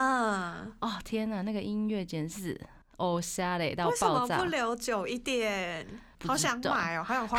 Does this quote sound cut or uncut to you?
uncut